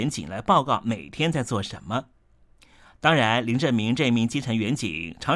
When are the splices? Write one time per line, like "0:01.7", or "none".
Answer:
none